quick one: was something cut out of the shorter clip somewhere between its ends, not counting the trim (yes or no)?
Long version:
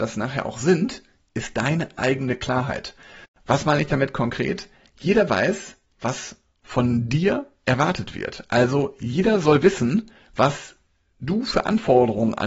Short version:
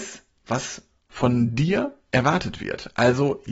no